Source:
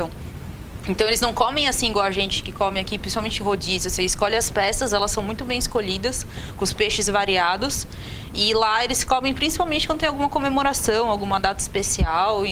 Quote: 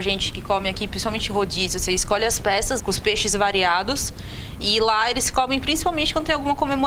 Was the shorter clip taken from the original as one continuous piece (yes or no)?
no